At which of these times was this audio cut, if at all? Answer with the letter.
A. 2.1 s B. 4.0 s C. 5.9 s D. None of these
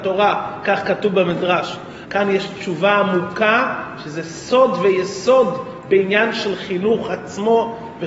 A